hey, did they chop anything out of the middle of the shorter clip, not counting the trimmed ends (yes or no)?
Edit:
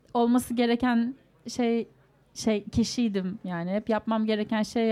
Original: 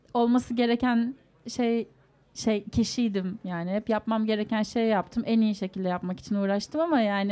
no